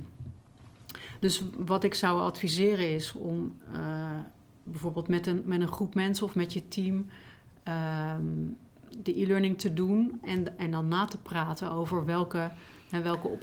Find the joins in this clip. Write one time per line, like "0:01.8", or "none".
none